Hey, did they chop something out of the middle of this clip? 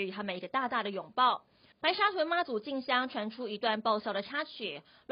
yes; 1 cut; at 1.7 s

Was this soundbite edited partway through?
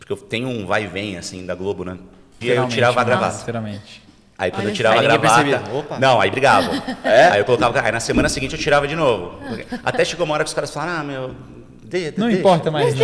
yes; 1 cut; at 2.4 s

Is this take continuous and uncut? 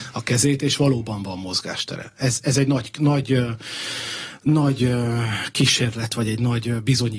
yes; 0 cuts

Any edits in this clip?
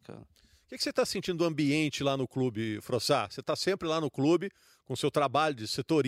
no; 0 cuts

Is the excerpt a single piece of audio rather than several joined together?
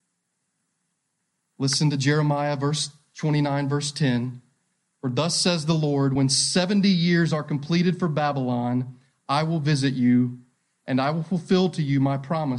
yes; 0 cuts

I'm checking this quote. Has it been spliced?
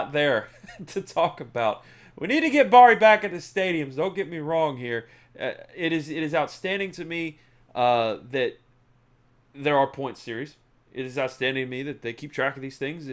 no; 0 cuts

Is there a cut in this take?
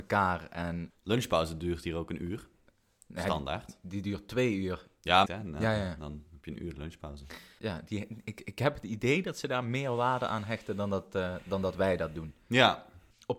yes; 2 cuts; at 5.2 s, 7.6 s

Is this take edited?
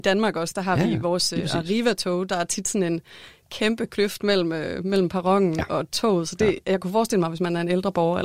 no; 0 cuts

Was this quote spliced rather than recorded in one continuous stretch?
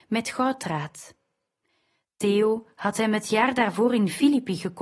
no; 0 cuts

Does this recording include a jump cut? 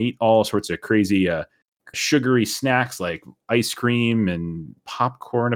yes; 1 cut; at 1.9 s

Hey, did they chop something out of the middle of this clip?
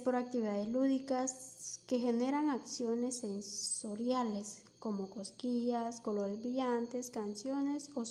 no; 0 cuts

